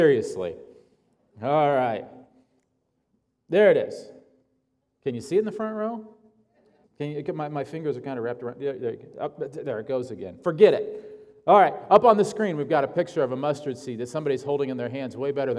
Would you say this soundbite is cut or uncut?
cut